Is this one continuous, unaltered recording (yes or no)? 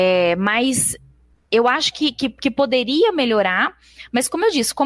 yes